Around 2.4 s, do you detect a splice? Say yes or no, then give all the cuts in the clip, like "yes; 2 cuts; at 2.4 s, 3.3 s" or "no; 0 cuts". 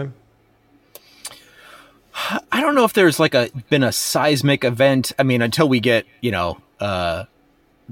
no; 0 cuts